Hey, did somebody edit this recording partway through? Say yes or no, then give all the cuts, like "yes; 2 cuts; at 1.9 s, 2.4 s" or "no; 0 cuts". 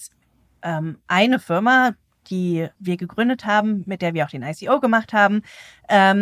yes; 1 cut; at 2.7 s